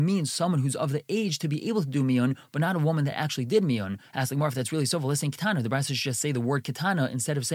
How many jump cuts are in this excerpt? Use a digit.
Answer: 0